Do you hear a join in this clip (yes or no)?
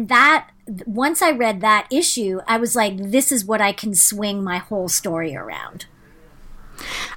no